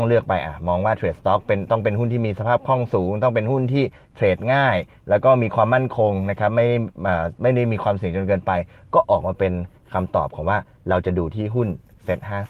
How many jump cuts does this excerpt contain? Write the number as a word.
zero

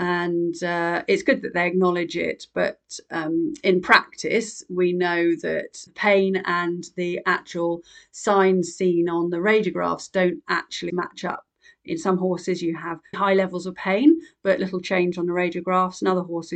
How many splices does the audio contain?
three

